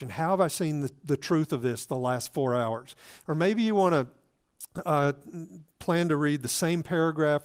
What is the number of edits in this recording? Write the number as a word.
one